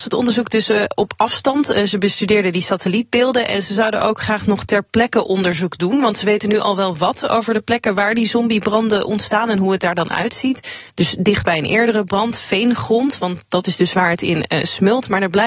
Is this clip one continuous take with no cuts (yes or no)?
yes